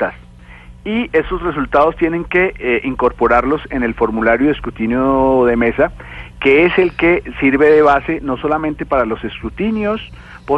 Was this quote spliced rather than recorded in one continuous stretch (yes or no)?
no